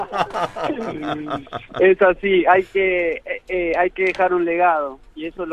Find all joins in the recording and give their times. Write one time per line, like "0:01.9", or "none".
none